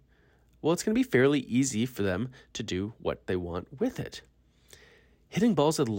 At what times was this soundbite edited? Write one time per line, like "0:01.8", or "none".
none